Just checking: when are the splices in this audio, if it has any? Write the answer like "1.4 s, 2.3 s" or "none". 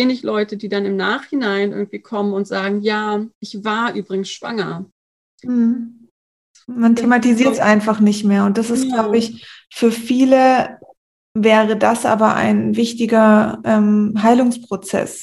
none

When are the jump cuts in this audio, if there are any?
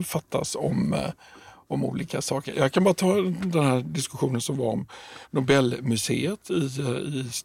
none

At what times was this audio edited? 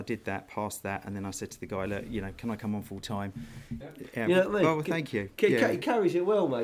3.8 s

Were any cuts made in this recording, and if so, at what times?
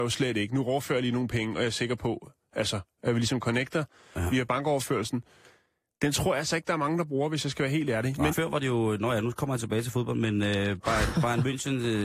8.3 s

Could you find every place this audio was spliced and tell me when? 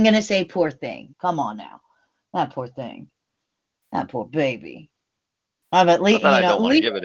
1.1 s

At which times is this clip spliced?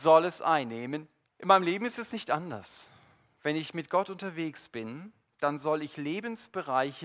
1.2 s

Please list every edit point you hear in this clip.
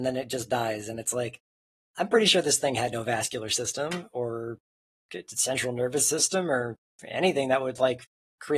none

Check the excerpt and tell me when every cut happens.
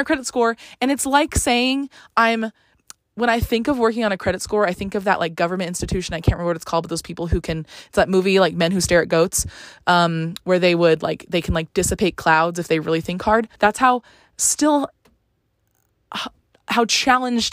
13.6 s

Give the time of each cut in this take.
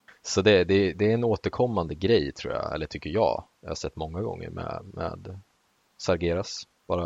0.9 s

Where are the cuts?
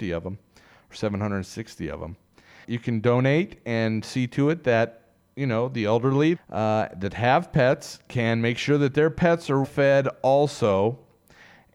2.6 s, 6.3 s, 9.6 s

